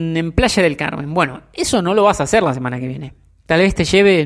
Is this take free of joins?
yes; 0 cuts

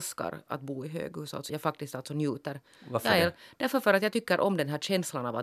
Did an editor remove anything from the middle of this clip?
yes; 1 cut; at 1.5 s

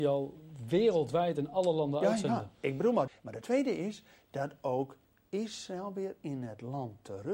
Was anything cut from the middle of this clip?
yes; 1 cut; at 3.1 s

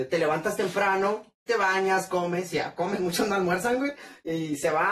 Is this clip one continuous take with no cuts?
no; 1 cut; at 1.3 s

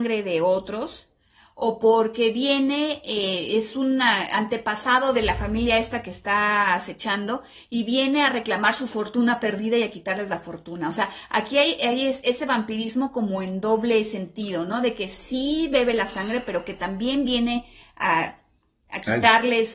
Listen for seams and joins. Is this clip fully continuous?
yes; 0 cuts

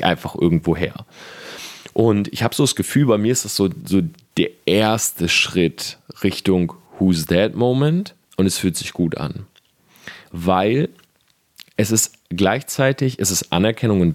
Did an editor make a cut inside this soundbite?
yes; 1 cut; at 8.2 s

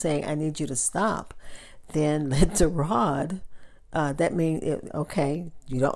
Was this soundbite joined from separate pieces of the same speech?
yes; 1 cut; at 4.9 s

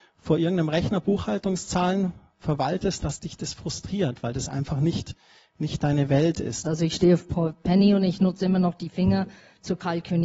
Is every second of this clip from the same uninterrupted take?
no; 2 cuts; at 3.0 s, 6.6 s

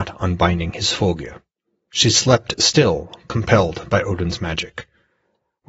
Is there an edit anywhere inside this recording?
no; 0 cuts

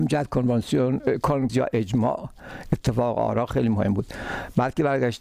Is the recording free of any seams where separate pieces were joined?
no; 1 cut; at 1.5 s

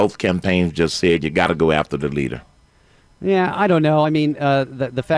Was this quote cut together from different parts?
no; 0 cuts

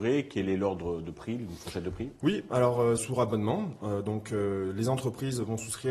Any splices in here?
yes; 1 cut; at 3.0 s

